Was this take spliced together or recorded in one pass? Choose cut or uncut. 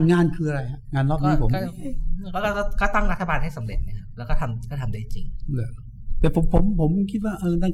uncut